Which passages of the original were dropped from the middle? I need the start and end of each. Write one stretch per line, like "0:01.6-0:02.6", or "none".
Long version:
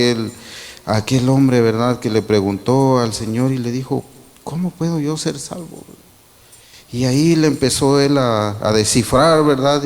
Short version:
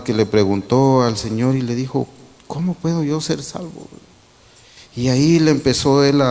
none